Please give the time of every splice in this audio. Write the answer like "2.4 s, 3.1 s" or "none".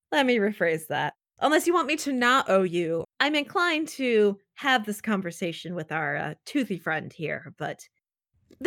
3.0 s